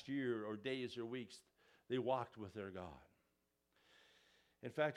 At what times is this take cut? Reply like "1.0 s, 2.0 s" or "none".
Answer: none